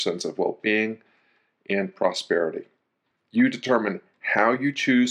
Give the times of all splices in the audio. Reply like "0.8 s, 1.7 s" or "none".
3.1 s